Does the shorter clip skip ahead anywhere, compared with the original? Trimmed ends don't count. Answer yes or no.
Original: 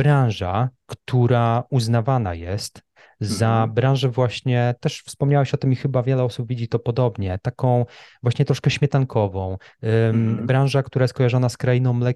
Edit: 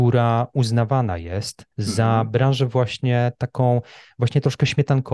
yes